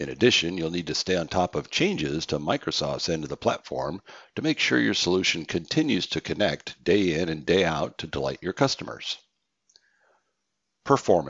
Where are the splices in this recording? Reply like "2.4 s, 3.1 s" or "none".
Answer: none